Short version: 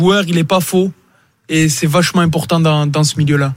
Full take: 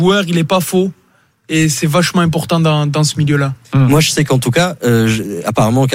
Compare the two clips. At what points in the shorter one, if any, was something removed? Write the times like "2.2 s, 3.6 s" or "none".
none